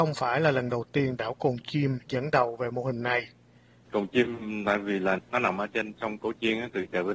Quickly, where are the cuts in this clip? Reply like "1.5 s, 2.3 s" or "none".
3.9 s, 5.2 s